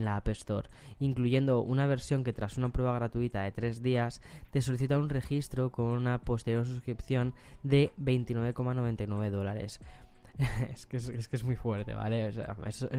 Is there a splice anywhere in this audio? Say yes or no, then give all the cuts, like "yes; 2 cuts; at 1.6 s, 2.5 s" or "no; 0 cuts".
no; 0 cuts